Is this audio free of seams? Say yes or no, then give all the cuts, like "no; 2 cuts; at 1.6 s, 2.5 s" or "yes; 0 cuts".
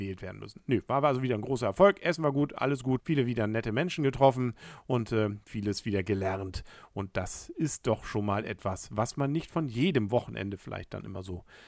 no; 1 cut; at 3.0 s